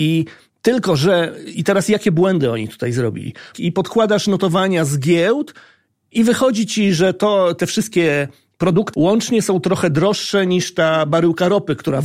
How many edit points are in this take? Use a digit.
2